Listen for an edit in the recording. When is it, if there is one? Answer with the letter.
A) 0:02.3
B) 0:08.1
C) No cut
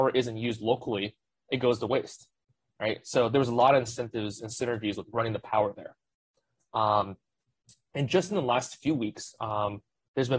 C